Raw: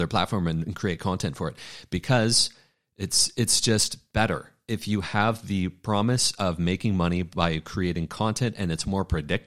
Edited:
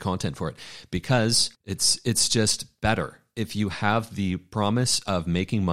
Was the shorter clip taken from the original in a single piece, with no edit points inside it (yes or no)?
no